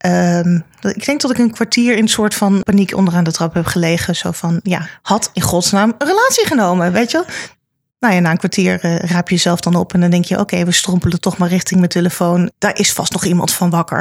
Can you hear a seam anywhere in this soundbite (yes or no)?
yes